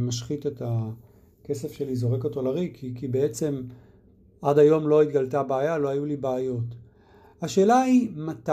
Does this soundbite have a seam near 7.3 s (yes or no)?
no